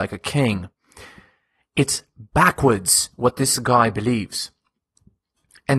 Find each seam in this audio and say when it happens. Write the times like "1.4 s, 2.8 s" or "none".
none